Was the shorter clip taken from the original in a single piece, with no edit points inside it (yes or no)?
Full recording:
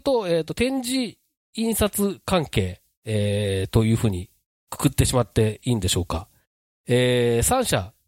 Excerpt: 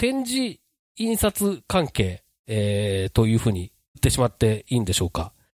no